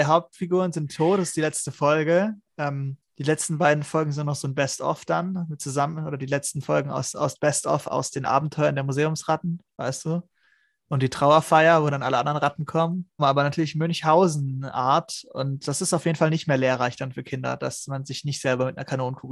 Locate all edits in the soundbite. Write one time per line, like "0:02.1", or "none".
0:03.1
0:13.2